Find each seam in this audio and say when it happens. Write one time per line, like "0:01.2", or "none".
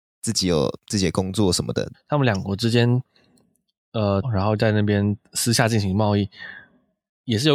0:01.9
0:04.2

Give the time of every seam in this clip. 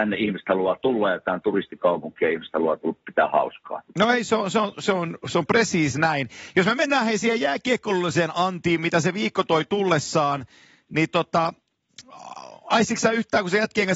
none

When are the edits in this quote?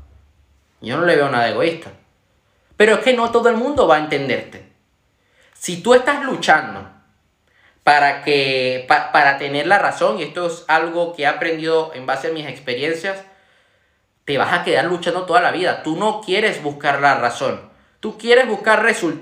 none

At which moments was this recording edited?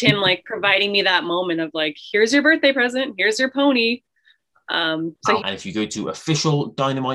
0:05.4

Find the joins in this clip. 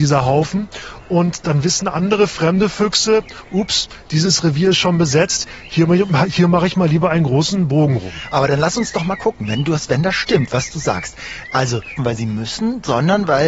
0:12.0

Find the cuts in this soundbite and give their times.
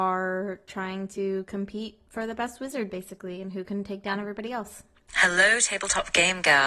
0:05.1

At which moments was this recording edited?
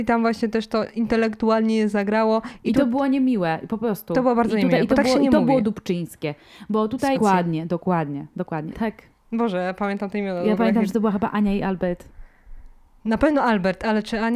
0:07.2
0:08.7

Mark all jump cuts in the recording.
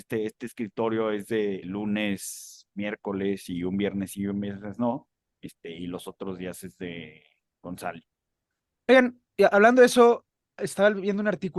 0:01.6

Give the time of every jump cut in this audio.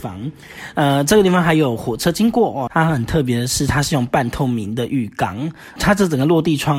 0:02.7
0:05.8

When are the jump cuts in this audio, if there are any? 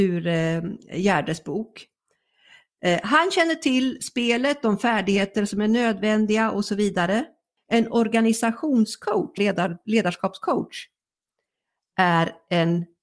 0:09.4

